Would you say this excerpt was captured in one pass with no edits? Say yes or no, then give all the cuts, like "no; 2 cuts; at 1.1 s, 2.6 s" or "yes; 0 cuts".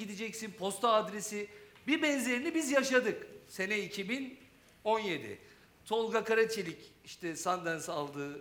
yes; 0 cuts